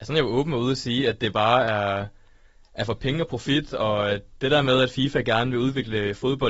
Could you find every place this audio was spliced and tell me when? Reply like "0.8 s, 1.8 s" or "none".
none